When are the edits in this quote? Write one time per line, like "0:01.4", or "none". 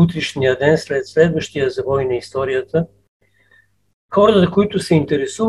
none